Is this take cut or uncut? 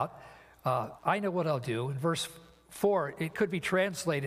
cut